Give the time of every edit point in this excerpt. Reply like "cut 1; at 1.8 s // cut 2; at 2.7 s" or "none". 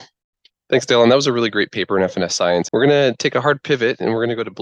cut 1; at 2.7 s